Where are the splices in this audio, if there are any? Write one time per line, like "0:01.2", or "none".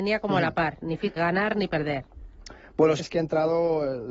0:01.2
0:03.0

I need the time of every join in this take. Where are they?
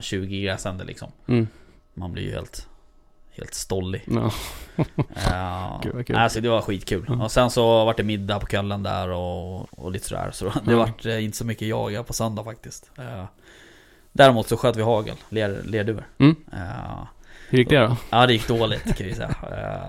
0:06.3
0:09.6
0:16.4

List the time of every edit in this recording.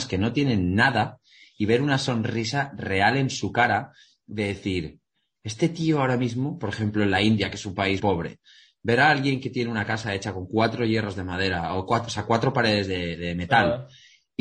0:08.0

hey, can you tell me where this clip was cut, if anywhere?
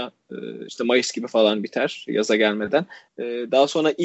0:03.1

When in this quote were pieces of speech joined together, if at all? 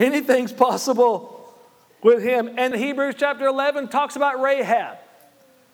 0:02.7

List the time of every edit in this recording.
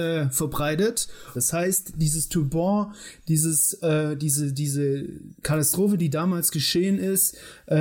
0:01.3

